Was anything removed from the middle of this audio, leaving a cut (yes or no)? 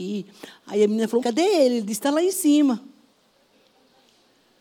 yes